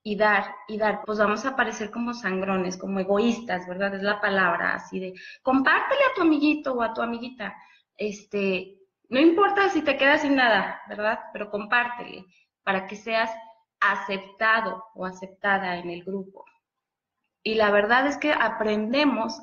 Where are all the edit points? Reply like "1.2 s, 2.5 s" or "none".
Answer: 1.0 s